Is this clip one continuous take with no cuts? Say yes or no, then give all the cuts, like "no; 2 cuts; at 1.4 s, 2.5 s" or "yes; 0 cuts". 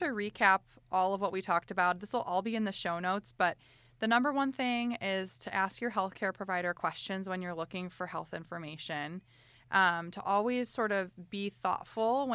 yes; 0 cuts